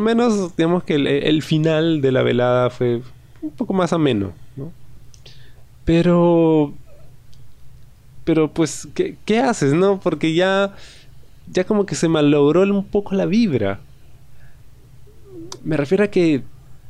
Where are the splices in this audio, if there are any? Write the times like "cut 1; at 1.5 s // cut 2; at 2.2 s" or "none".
none